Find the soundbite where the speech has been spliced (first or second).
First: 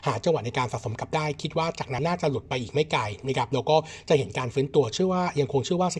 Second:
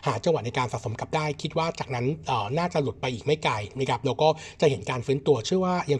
first